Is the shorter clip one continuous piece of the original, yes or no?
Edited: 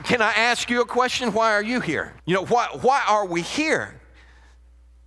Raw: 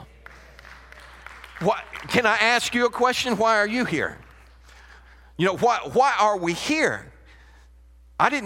no